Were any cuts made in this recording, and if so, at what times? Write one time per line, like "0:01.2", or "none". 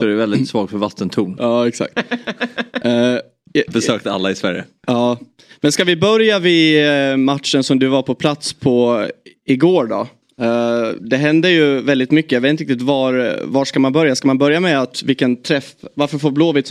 none